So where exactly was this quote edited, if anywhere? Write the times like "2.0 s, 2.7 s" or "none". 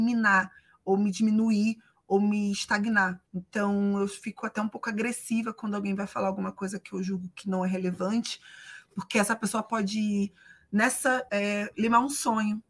3.3 s, 11.3 s